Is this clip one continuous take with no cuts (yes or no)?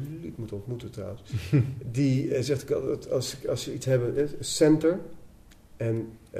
yes